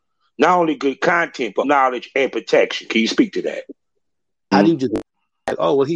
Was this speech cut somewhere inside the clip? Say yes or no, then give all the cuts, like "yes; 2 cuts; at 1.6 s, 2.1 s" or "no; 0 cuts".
yes; 2 cuts; at 1.6 s, 4.5 s